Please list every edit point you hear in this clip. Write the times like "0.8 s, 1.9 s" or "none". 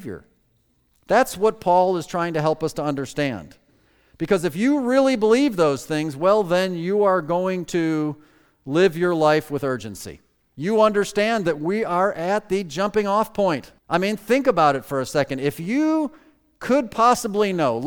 10.5 s, 13.8 s